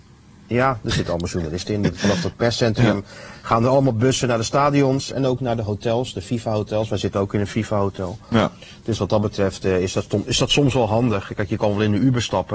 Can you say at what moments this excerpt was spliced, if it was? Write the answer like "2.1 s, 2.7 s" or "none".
none